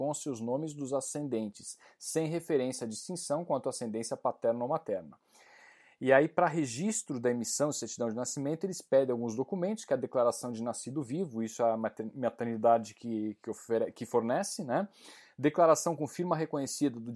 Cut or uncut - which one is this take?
uncut